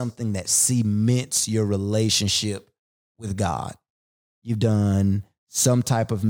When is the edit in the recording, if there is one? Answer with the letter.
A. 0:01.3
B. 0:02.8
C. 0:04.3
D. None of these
C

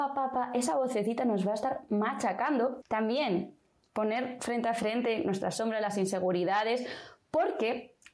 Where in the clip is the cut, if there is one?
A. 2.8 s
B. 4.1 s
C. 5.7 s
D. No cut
A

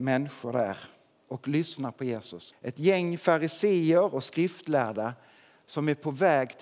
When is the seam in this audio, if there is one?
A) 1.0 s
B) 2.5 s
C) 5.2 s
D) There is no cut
B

